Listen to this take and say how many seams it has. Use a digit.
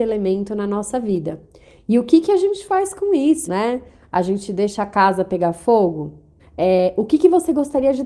2